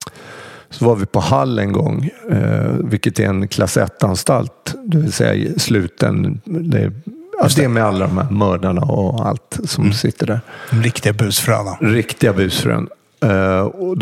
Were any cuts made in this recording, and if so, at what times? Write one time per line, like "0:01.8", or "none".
none